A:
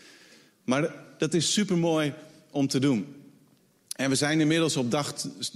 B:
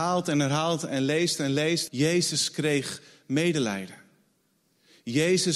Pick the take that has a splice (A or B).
B